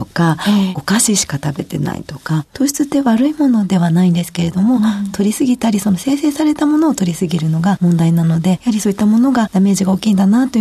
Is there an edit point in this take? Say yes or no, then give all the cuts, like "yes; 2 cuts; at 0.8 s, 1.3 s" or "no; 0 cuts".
no; 0 cuts